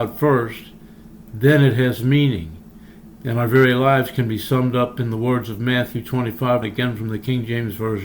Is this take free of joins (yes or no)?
no